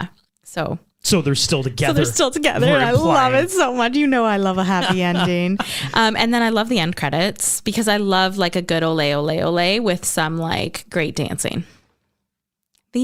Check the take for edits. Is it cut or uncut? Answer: uncut